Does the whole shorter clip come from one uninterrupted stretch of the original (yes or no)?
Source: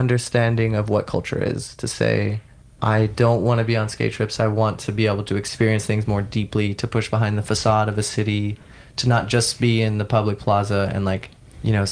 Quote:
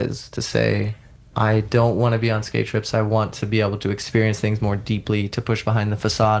yes